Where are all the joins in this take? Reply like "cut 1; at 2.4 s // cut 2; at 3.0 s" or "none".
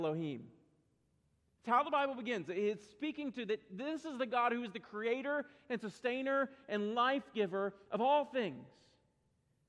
none